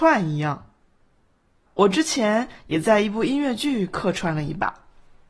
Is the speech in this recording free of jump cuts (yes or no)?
no